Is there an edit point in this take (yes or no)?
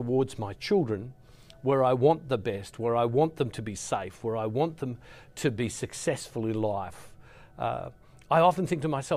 no